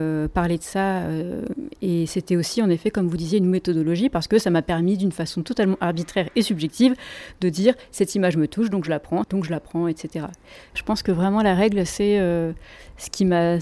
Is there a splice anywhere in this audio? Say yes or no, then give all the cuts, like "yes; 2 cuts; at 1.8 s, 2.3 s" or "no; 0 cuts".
yes; 2 cuts; at 9.2 s, 10.7 s